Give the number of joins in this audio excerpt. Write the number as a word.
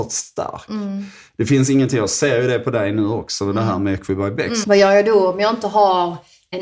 one